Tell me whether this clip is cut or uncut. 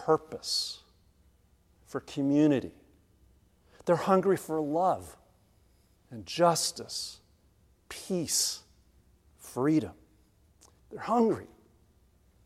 cut